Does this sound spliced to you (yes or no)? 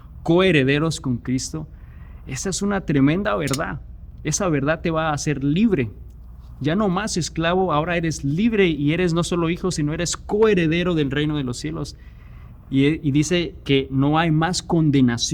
no